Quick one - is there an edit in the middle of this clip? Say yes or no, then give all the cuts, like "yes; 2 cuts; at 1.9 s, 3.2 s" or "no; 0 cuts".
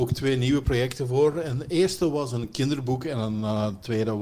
no; 0 cuts